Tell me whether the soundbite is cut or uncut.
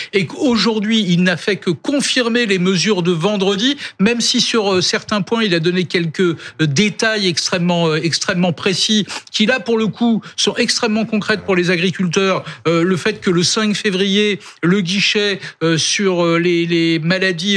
uncut